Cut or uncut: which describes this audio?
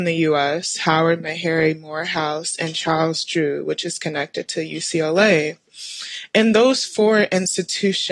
uncut